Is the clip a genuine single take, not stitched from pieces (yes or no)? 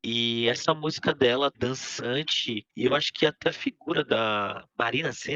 no